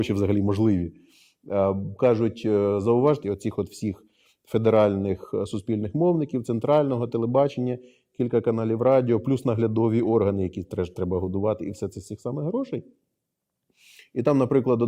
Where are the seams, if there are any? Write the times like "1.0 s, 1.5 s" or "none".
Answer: 3.2 s